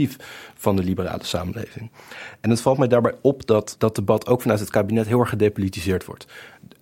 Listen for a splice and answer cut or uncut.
cut